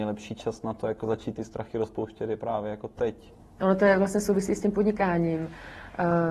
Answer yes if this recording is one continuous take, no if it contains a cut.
no